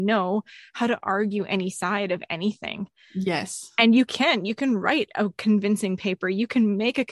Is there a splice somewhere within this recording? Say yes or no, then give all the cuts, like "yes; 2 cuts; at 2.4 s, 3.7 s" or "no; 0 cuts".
no; 0 cuts